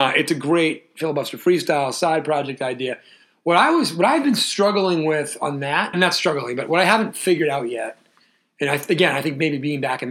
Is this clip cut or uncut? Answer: cut